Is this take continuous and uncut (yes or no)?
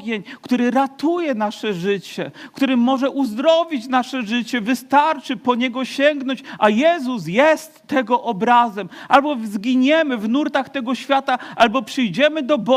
yes